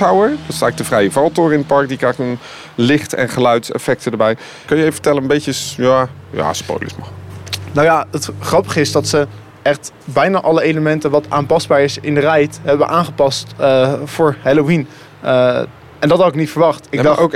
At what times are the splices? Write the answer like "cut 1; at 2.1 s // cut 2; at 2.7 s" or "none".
cut 1; at 4.7 s